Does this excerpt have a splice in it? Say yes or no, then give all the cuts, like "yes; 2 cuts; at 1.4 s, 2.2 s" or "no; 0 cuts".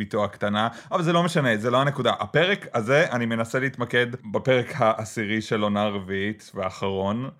no; 0 cuts